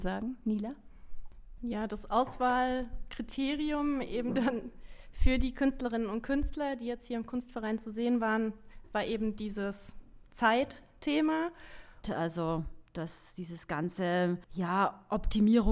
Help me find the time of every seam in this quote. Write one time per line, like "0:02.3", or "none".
0:12.0
0:14.4